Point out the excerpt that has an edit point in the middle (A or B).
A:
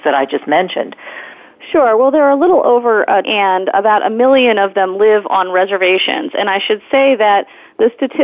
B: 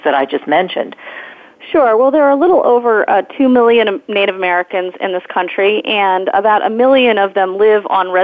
A